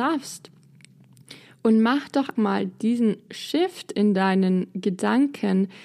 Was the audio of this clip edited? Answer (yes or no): yes